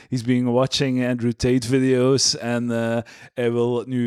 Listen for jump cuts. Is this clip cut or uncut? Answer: uncut